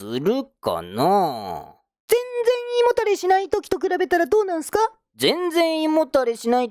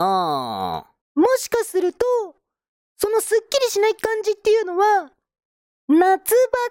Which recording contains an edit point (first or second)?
second